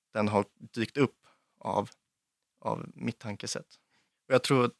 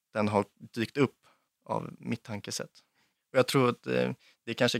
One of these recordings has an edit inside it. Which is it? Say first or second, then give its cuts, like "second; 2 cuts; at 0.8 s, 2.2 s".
second; 1 cut; at 1.5 s